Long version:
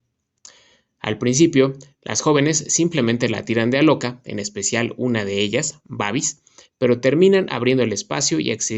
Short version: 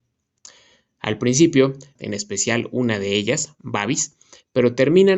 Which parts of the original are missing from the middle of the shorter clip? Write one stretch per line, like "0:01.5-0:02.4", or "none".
0:02.0-0:04.2